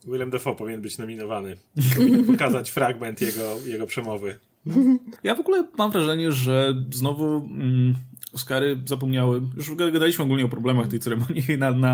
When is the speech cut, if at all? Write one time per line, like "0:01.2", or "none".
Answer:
0:05.2